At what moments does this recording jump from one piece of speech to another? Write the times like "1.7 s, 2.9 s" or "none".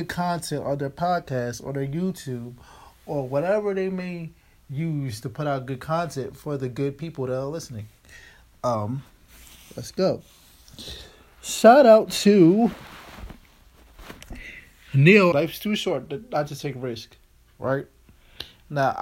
15.3 s